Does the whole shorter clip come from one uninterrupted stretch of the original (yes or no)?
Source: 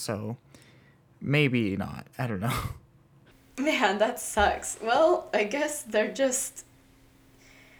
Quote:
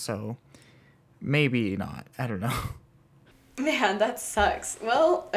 yes